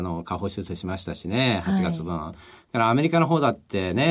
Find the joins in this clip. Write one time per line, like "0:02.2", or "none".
none